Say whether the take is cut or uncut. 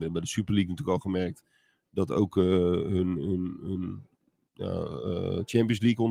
uncut